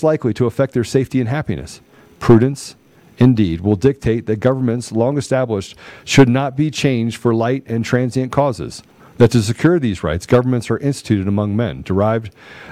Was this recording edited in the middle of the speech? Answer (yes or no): yes